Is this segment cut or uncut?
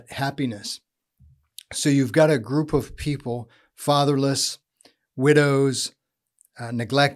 uncut